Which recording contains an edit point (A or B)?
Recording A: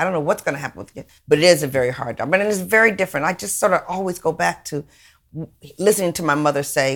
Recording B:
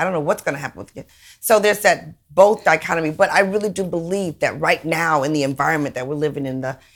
A